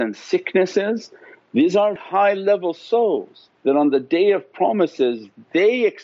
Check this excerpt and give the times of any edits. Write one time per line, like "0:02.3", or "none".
0:02.0
0:03.6